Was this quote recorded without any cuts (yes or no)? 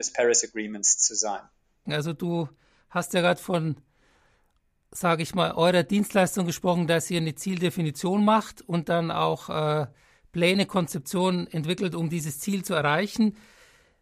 no